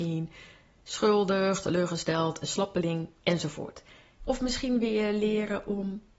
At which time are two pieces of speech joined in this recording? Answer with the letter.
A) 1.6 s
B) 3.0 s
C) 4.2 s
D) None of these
C